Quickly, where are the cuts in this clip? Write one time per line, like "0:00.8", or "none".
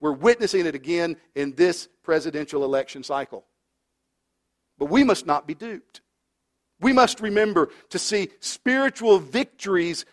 none